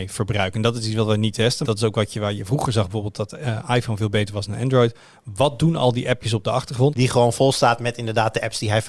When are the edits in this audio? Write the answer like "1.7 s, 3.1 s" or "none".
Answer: 1.6 s, 6.9 s